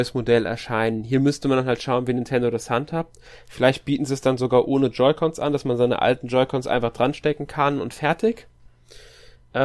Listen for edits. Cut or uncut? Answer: uncut